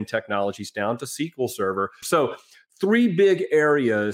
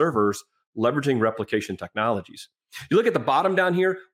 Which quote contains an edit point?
first; 1 cut; at 2.0 s

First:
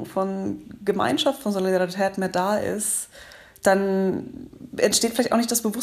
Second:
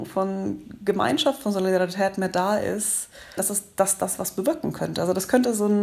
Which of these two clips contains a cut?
second; 1 cut; at 3.4 s

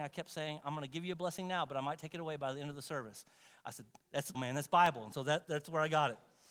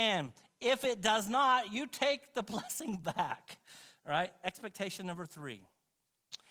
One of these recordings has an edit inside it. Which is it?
first; 2 cuts; at 4.3 s, 5.4 s

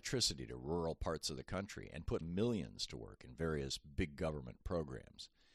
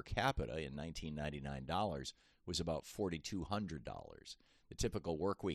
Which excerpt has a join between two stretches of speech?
first; 1 cut; at 2.2 s

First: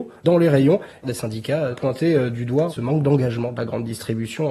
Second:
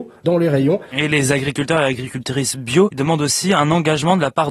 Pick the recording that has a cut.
second; 1 cut; at 0.9 s

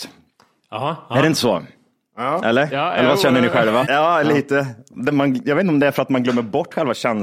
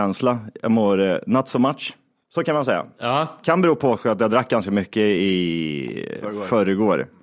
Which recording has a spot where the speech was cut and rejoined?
first; 2 cuts; at 3.8 s, 5.1 s

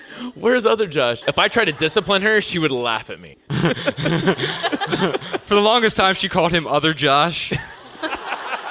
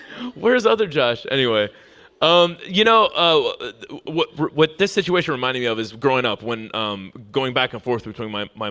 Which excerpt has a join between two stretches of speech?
first; 2 cuts; at 1.2 s, 3.3 s

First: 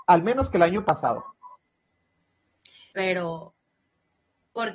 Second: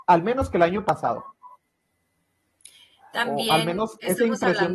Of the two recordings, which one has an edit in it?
first; 1 cut; at 2.9 s

